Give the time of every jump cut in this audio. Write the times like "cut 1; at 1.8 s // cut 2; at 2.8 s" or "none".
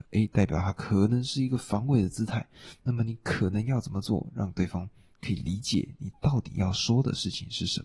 none